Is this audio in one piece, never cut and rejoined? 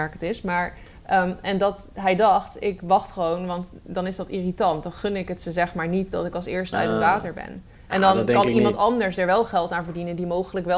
yes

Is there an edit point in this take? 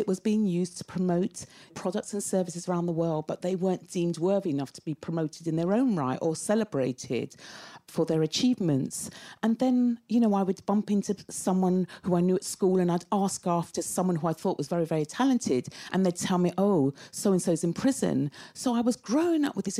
no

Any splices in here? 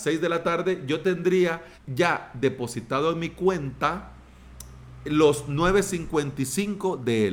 yes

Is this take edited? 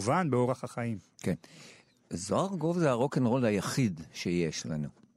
no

